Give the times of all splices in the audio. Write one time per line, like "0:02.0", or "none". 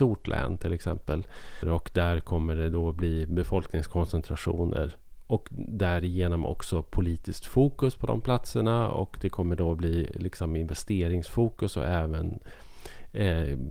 0:01.6

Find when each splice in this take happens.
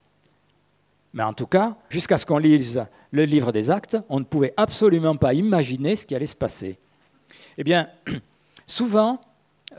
0:01.9

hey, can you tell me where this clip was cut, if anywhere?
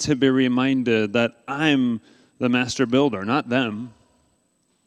none

